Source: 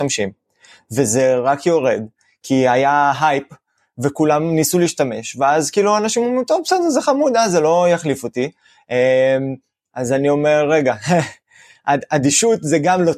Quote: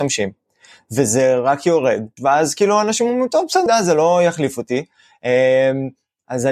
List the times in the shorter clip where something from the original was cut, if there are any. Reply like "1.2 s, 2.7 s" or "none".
2.2 s, 3.7 s